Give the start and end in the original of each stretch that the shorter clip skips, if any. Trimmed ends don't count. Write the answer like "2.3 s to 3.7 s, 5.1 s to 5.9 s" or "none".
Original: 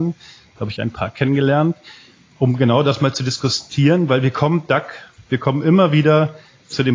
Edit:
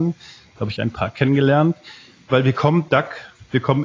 2.3 s to 4.1 s